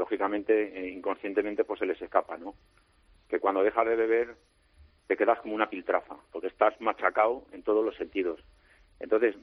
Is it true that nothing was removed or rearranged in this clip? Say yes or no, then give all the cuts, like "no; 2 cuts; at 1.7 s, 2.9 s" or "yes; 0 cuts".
yes; 0 cuts